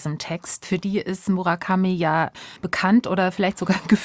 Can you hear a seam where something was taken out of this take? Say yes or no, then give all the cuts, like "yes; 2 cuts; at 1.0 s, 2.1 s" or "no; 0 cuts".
yes; 1 cut; at 2.6 s